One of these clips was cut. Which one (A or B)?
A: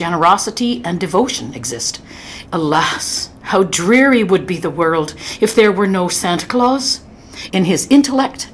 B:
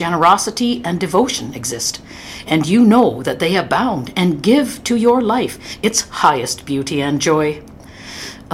A